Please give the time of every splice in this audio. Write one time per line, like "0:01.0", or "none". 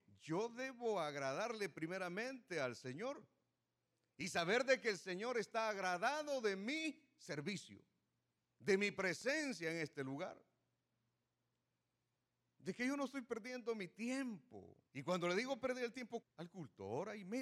0:14.9
0:16.2

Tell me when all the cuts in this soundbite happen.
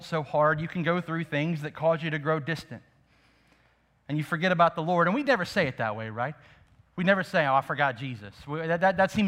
none

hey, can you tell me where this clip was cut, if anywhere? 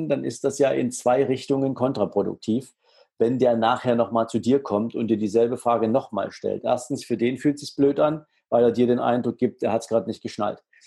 none

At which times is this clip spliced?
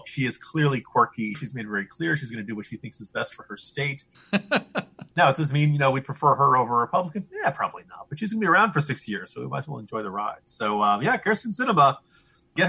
0:01.3
0:04.1

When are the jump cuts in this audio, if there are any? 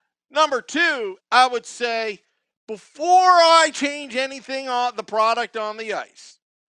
0:01.2

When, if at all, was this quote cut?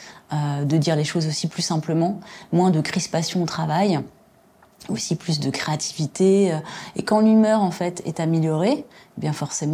none

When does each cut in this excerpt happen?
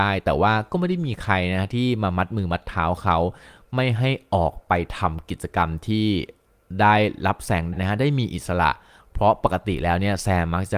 0:07.7

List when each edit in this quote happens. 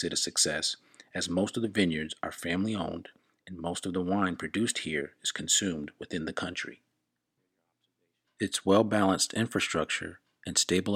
none

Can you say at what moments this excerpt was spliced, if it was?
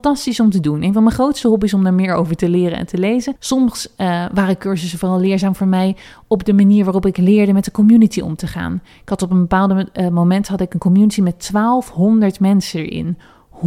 0:03.4

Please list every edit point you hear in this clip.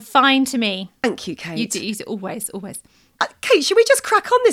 none

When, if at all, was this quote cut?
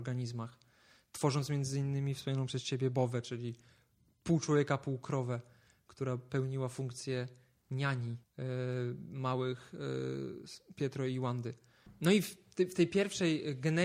none

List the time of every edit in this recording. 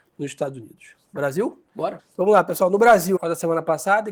0:02.0
0:03.2

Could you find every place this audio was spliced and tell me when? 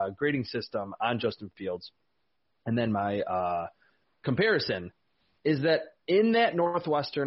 none

